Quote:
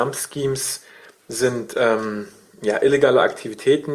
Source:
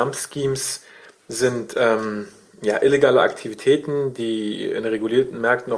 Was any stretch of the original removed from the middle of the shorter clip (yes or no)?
no